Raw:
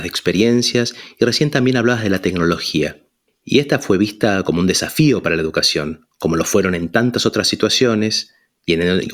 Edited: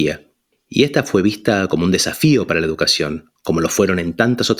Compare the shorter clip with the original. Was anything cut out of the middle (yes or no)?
no